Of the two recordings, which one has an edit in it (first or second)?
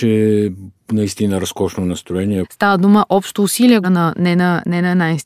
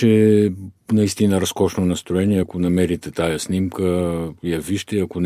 first